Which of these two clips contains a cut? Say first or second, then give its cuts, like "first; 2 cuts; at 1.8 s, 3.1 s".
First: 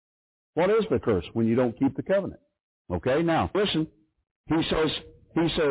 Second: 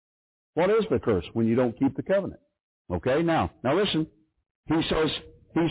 first; 1 cut; at 3.5 s